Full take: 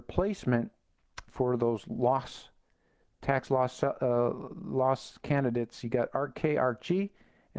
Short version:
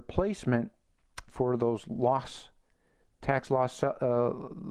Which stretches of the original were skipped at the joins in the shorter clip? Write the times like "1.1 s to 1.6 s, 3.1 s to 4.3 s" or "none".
none

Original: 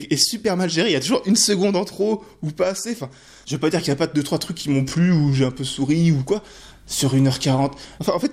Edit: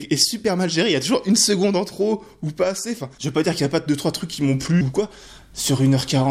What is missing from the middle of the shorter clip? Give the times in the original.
3.1 s to 3.4 s, 5.1 s to 6.1 s

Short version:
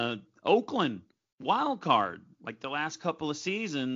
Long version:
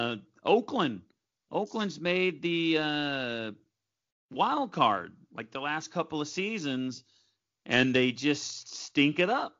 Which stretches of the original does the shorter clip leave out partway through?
1.3 s to 4.2 s

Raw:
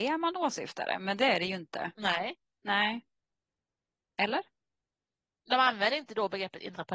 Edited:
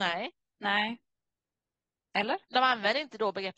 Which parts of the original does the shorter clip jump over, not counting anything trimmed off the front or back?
4.5 s to 5.4 s

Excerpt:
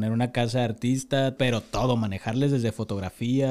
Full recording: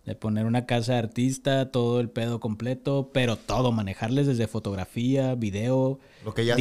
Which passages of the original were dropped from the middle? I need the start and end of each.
1.7 s to 3.1 s

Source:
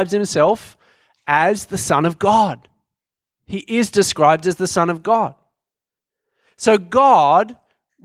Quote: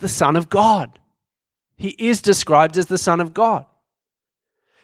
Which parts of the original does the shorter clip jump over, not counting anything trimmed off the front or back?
none

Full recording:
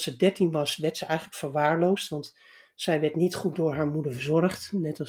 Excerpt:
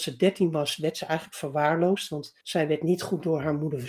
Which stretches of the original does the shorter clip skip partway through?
2.4 s to 2.7 s

